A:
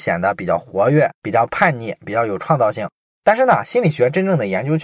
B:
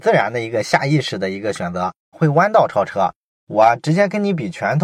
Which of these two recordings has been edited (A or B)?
B